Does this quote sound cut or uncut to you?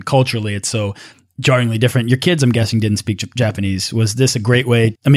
uncut